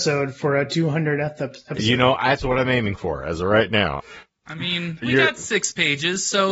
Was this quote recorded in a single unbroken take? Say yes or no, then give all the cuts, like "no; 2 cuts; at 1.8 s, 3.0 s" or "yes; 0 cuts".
no; 2 cuts; at 4.0 s, 5.0 s